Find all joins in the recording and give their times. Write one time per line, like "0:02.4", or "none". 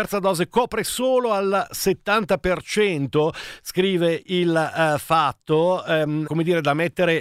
0:06.3